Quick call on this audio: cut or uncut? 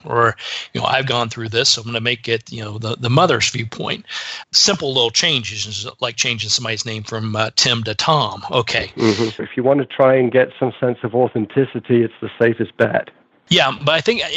cut